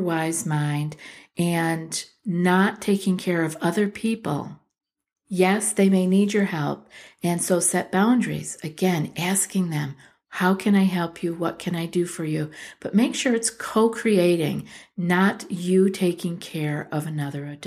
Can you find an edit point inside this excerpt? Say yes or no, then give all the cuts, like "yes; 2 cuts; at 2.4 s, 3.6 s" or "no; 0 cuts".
no; 0 cuts